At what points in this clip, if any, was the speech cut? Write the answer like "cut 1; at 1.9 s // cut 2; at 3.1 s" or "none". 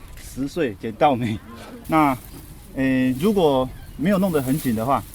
cut 1; at 1.8 s